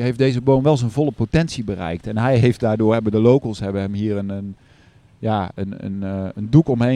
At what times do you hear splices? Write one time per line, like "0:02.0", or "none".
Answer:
none